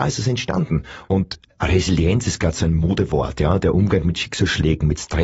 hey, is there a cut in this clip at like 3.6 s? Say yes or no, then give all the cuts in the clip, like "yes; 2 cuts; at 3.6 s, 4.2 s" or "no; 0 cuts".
no; 1 cut; at 1.0 s